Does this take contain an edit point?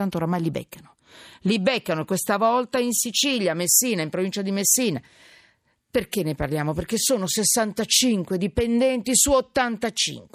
no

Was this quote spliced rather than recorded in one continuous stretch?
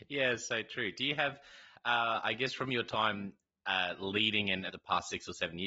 yes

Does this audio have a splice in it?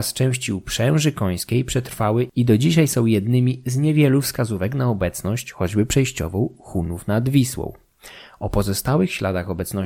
no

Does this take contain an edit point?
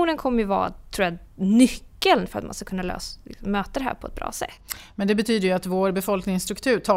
no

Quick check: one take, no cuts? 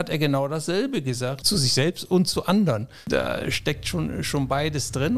no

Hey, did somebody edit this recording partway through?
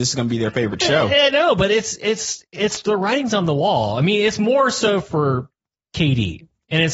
no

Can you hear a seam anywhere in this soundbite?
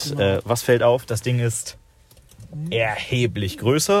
no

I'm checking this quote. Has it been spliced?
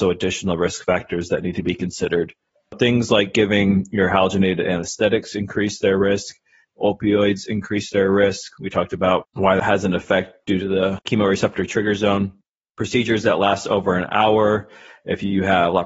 no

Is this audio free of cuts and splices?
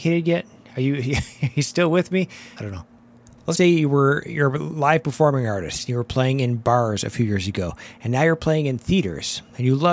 no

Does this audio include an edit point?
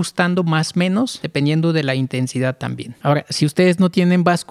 no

